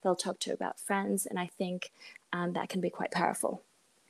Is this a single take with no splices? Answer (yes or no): yes